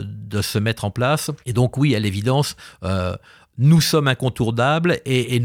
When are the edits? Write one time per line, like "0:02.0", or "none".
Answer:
0:01.4

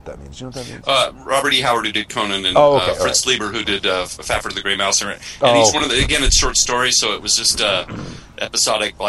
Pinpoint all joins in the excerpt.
none

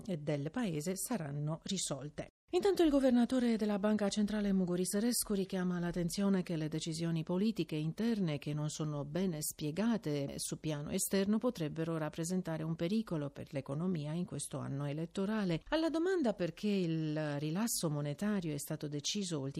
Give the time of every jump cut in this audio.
0:15.6

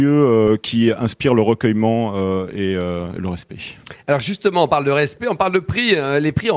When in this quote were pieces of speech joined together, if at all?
none

